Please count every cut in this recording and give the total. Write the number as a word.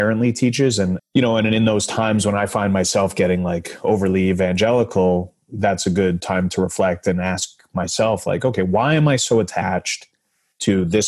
one